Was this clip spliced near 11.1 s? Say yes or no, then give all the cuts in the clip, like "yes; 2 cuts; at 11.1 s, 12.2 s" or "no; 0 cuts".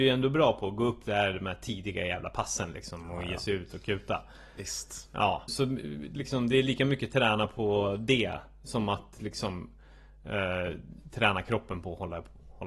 no; 1 cut; at 5.5 s